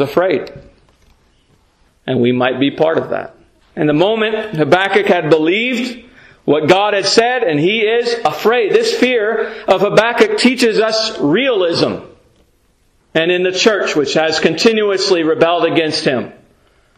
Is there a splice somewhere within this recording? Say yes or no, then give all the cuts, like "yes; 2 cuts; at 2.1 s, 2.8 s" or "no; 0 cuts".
yes; 3 cuts; at 1.9 s, 3.6 s, 13.0 s